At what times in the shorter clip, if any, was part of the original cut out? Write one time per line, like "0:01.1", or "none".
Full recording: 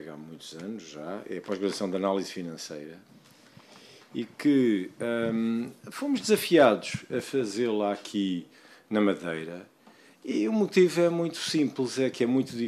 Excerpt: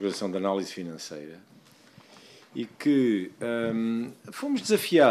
none